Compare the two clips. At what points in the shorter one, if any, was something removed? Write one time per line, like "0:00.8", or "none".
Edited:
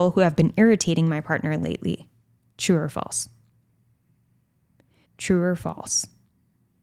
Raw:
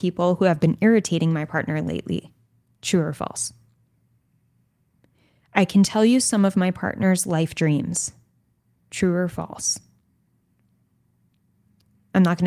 0:05.1